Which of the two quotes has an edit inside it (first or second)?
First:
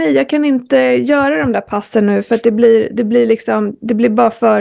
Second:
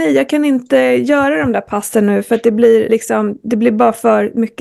second